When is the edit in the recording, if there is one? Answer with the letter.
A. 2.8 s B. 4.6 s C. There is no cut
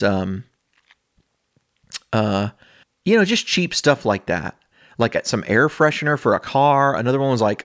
A